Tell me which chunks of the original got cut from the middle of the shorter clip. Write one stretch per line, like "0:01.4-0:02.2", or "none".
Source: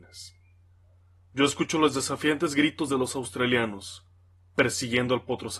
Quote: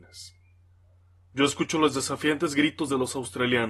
none